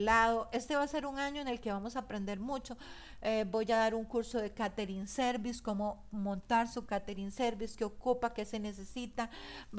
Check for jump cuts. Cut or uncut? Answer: uncut